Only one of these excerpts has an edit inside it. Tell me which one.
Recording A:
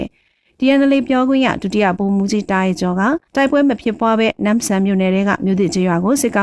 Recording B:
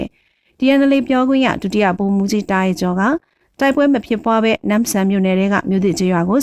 A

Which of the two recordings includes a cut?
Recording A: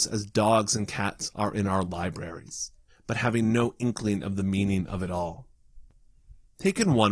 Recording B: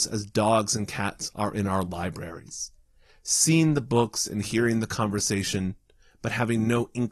A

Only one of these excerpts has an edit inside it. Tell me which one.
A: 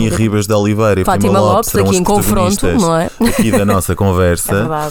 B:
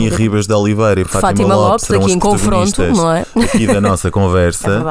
A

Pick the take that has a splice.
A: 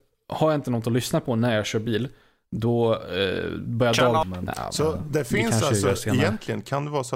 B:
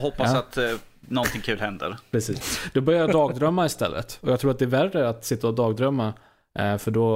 A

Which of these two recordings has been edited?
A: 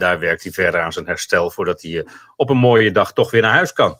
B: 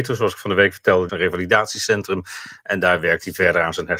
B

